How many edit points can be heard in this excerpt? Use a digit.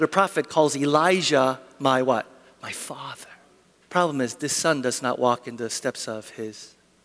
1